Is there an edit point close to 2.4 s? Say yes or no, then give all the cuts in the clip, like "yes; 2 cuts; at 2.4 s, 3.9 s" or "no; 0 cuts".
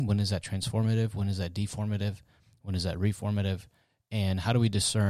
no; 0 cuts